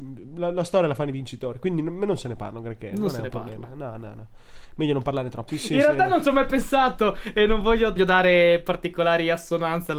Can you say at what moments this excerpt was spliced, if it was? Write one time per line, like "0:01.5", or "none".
0:05.5
0:08.0